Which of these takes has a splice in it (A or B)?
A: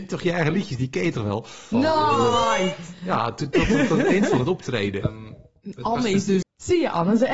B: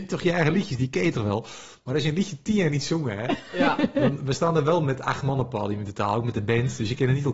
A